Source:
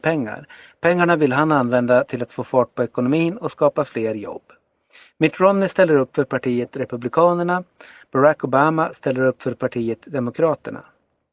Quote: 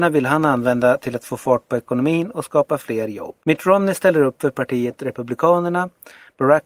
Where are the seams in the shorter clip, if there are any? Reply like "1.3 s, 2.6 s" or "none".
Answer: 3.4 s

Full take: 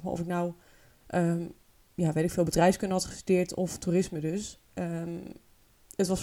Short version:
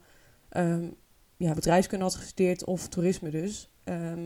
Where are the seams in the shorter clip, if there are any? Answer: 1.6 s

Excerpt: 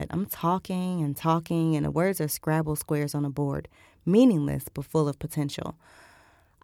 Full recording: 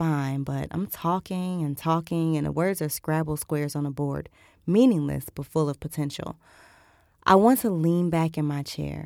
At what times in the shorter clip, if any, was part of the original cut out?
none

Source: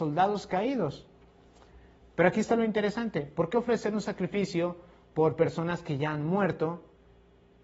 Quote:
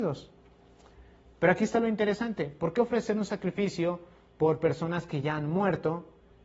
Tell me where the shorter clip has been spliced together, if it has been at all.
none

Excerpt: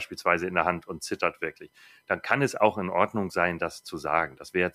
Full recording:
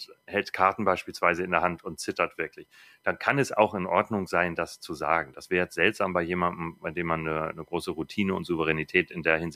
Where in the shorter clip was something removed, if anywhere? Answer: none

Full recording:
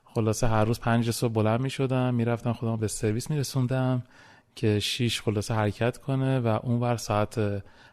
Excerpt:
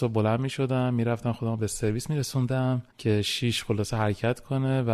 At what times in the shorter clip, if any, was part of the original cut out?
2.9 s

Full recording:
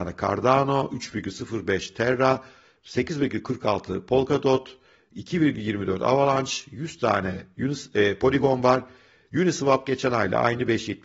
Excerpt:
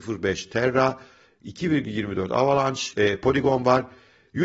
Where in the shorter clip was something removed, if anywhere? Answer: 1.3 s, 2.9 s

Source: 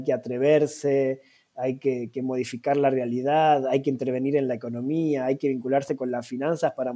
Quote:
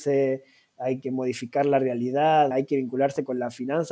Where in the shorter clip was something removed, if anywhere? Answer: 1.0 s, 2.5 s

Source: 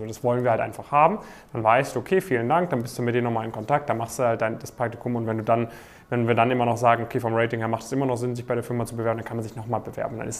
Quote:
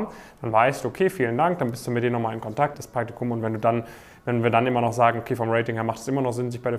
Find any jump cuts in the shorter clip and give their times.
2.7 s

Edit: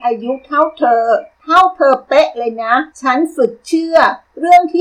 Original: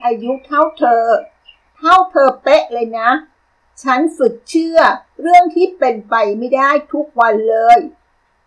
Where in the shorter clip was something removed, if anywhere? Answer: 1.3 s, 2.9 s

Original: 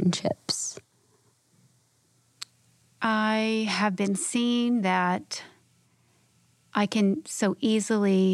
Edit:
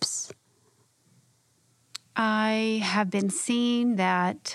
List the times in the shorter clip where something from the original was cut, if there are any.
2.1 s

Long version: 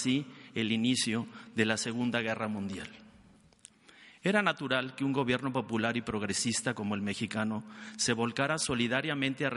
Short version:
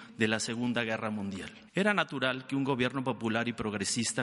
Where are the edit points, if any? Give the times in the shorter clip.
1.7 s

